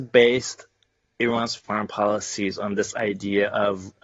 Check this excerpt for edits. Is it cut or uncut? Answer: uncut